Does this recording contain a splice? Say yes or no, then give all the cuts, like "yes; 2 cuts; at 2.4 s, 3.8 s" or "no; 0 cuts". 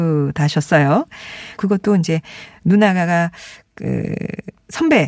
yes; 1 cut; at 1.6 s